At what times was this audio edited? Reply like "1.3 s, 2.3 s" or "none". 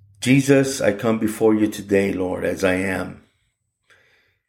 none

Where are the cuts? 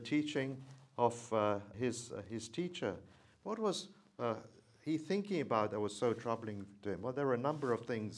1.7 s, 3.2 s

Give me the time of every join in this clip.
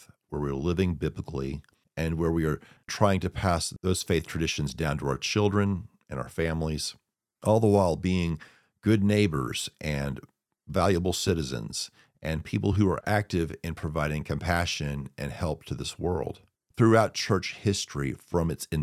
none

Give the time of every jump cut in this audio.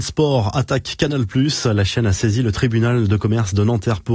none

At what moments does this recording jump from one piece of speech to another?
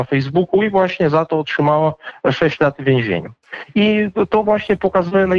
none

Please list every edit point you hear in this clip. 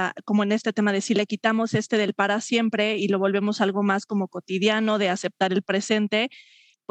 none

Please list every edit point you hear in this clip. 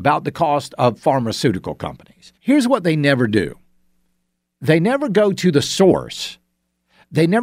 2.4 s

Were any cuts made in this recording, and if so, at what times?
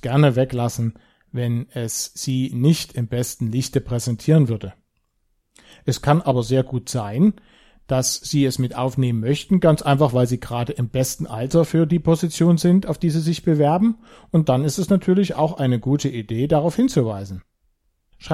none

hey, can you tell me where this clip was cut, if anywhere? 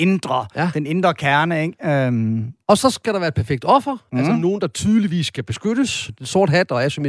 6.1 s

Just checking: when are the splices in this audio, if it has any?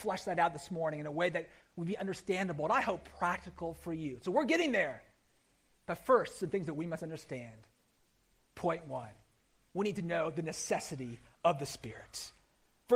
none

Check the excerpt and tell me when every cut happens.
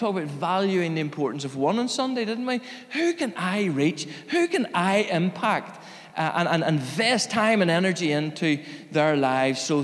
none

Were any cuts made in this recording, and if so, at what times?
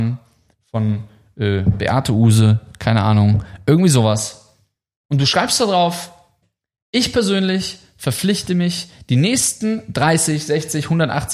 none

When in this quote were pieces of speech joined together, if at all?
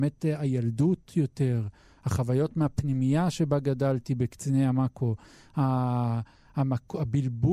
none

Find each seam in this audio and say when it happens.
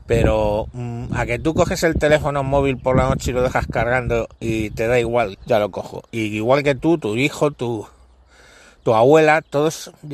5.3 s, 7.5 s

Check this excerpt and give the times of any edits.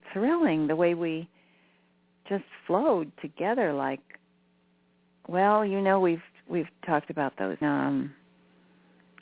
7.6 s

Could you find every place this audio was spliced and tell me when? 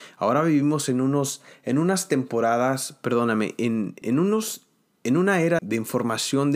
4.0 s, 5.6 s

